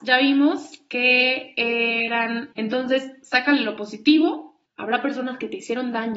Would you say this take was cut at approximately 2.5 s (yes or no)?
yes